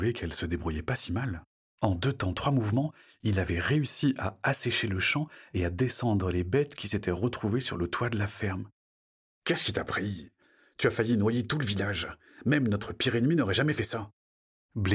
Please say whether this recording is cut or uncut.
cut